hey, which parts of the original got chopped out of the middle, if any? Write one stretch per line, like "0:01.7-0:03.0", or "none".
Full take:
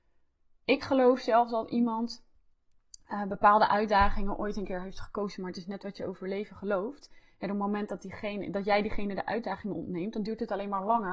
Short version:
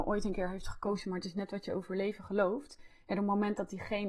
none